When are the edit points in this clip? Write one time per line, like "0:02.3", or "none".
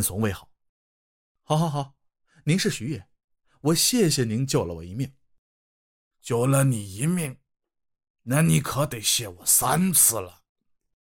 none

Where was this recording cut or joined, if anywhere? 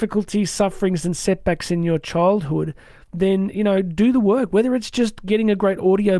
none

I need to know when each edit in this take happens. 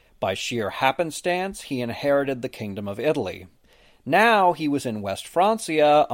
none

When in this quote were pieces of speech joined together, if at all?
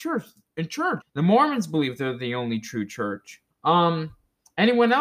0:01.0
0:03.5

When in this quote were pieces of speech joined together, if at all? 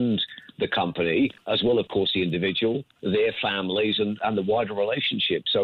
none

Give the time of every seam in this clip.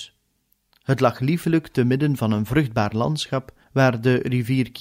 0:03.6

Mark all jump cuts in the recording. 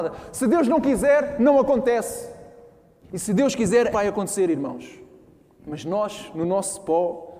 0:03.9
0:05.6

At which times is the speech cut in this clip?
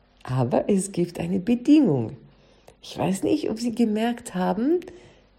none

